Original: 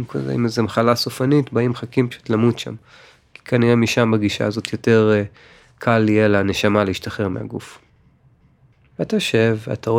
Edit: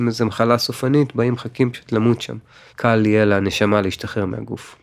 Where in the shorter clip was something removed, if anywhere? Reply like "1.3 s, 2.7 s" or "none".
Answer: 2.7 s